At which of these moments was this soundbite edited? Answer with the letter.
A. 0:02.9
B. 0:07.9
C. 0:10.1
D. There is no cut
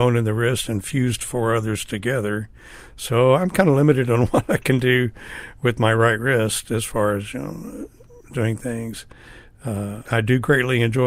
C